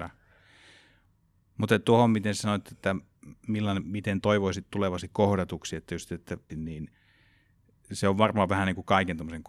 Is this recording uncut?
no; 1 cut; at 6.5 s

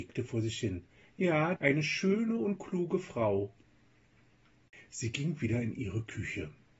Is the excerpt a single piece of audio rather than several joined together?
no; 1 cut; at 1.6 s

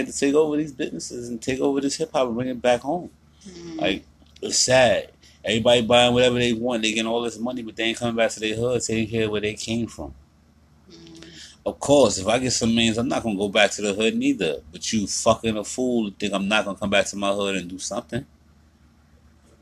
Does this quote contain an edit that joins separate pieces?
no; 0 cuts

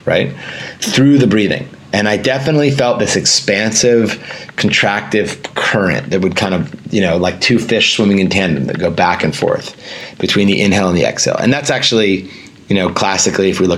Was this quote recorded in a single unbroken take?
yes; 0 cuts

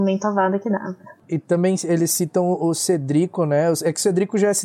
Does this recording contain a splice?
yes; 1 cut; at 1.2 s

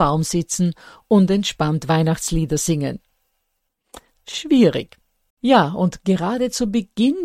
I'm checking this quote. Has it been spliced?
yes; 1 cut; at 5.3 s

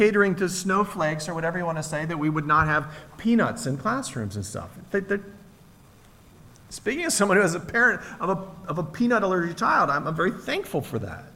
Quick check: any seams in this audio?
no; 0 cuts

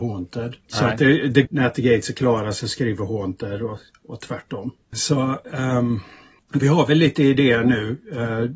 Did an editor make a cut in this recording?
yes; 1 cut; at 1.5 s

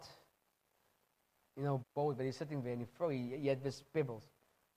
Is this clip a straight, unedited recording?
no; 1 cut; at 1.8 s

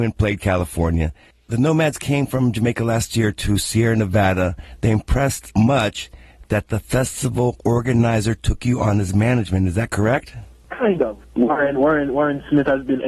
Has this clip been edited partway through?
yes; 1 cut; at 5.5 s

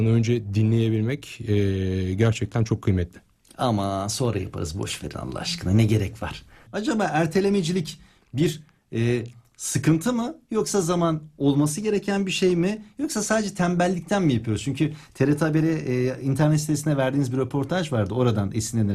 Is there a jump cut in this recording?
yes; 2 cuts; at 6.7 s, 10.8 s

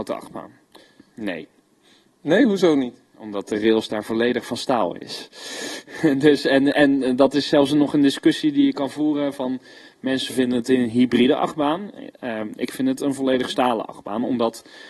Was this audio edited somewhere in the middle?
yes; 1 cut; at 1.1 s

